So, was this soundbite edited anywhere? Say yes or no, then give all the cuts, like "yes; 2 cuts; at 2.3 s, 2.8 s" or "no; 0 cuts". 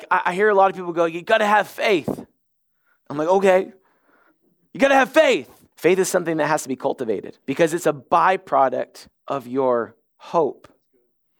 yes; 2 cuts; at 5.7 s, 7.4 s